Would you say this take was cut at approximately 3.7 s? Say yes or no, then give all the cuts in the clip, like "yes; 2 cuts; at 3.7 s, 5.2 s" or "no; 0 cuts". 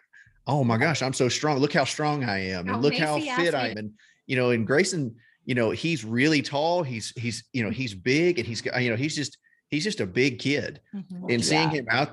yes; 1 cut; at 3.7 s